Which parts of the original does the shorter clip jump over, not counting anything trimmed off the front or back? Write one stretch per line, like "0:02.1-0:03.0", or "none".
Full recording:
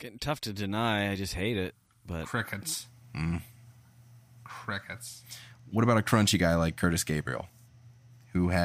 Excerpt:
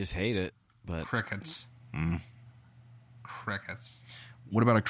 none